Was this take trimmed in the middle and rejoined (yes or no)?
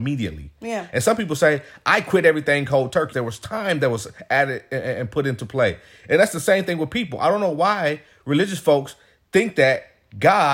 yes